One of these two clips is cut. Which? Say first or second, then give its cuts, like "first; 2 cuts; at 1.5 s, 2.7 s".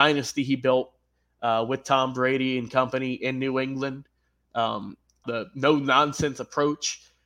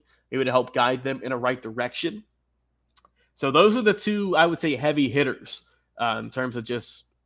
first; 1 cut; at 5.2 s